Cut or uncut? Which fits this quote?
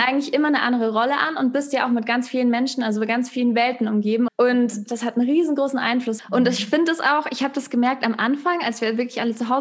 cut